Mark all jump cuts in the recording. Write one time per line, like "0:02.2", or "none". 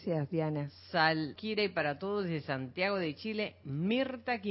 0:01.4